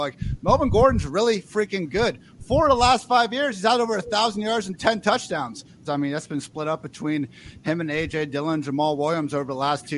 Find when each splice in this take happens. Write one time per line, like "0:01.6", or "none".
0:05.8